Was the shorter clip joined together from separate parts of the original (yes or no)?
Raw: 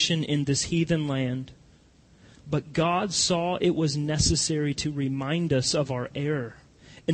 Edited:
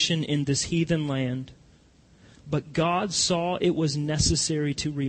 no